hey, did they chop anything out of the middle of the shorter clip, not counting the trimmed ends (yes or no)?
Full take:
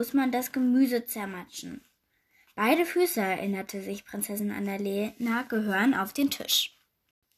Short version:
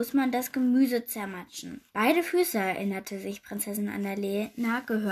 yes